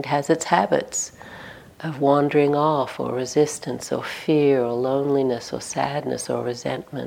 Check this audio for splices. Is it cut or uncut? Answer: uncut